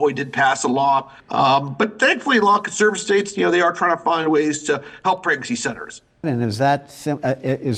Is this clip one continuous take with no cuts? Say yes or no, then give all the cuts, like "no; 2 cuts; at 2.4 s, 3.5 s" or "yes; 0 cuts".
no; 2 cuts; at 1.2 s, 6.2 s